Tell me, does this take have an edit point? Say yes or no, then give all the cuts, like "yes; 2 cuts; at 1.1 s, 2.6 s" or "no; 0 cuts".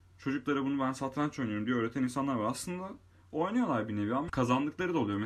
no; 0 cuts